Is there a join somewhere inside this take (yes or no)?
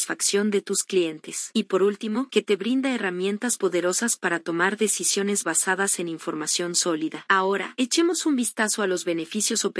yes